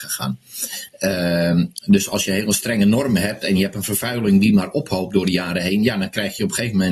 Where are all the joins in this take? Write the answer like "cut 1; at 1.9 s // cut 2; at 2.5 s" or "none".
cut 1; at 1.8 s